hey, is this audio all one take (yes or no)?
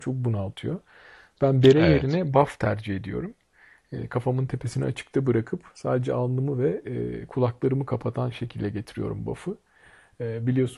yes